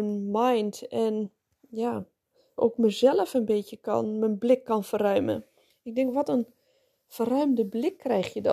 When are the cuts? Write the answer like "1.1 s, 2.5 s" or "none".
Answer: 2.6 s, 5.7 s